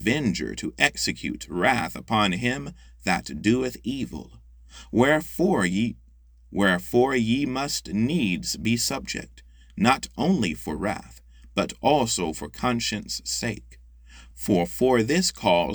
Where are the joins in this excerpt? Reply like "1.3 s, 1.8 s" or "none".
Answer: 14.3 s